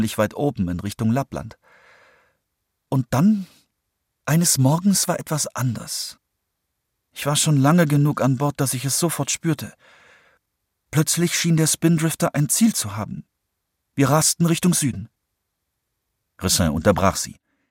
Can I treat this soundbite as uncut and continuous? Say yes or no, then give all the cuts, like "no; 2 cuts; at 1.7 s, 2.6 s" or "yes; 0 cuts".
yes; 0 cuts